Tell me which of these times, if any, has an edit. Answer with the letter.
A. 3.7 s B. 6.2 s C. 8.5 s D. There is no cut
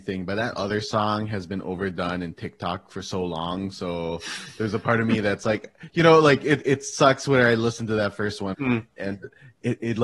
C